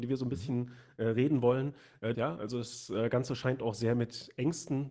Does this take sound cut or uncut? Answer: cut